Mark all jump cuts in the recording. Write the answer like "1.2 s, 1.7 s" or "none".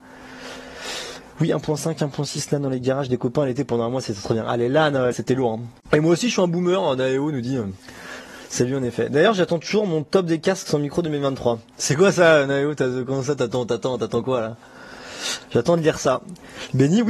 5.1 s